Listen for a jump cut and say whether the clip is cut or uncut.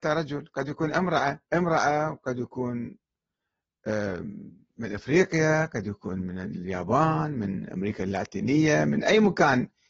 cut